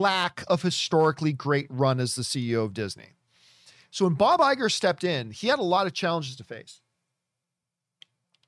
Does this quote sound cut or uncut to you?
uncut